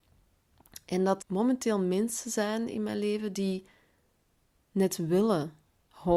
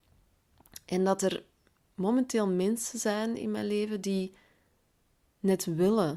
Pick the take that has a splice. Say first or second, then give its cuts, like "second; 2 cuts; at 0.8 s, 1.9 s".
first; 1 cut; at 1.2 s